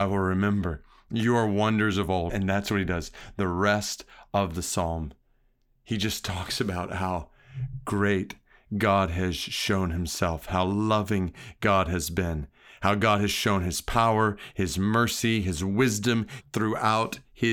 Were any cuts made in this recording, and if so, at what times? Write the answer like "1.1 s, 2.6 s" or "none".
2.3 s, 10.4 s, 16.4 s